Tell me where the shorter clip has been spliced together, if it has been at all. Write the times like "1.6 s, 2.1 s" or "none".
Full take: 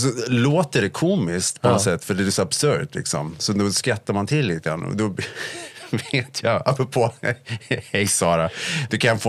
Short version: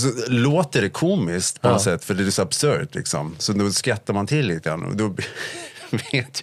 none